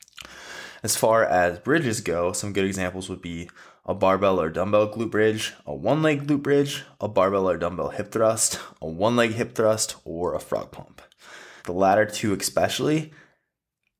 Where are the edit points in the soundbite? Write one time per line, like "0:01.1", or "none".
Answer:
0:11.6